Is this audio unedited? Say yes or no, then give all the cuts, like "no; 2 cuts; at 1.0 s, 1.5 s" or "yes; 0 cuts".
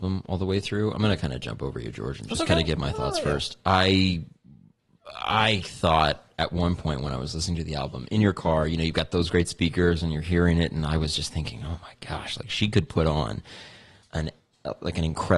yes; 0 cuts